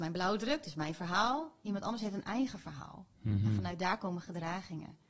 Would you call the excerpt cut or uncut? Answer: uncut